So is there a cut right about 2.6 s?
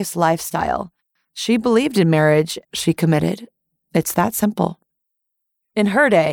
yes; 2 cuts; at 1.2 s, 2.6 s

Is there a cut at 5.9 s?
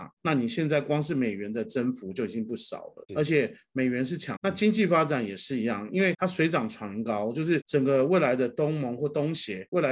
no; 1 cut; at 4.4 s

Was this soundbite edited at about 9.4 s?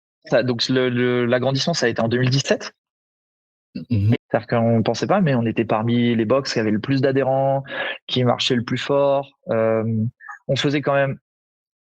no; 1 cut; at 4.2 s

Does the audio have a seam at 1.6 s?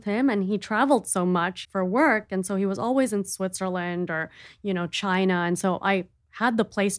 yes; 1 cut; at 1.6 s

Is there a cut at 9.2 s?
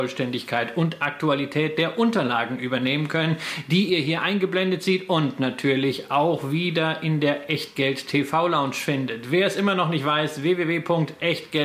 no; 0 cuts

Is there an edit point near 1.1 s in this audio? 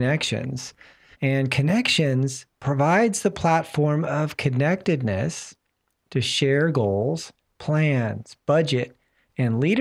yes; 1 cut; at 1.1 s

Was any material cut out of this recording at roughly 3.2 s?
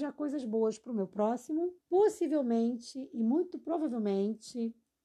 no; 1 cut; at 1.8 s

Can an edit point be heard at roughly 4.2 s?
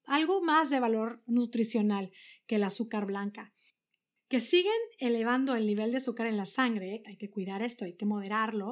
yes; 2 cuts; at 4.2 s, 7.0 s

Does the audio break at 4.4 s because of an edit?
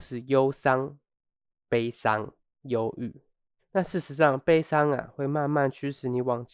no; 0 cuts

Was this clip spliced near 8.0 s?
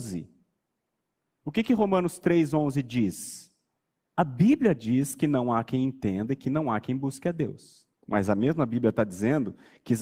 yes; 2 cuts; at 4.1 s, 8.0 s

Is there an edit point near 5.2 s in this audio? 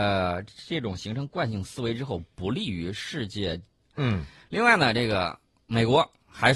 no; 1 cut; at 3.9 s

